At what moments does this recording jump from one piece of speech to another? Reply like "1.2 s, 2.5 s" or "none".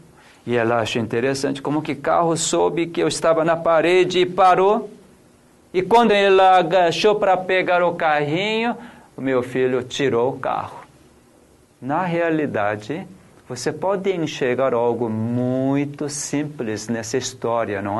6.1 s, 11.6 s